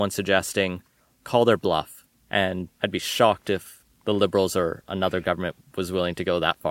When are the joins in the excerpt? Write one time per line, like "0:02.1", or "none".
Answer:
0:01.2
0:02.7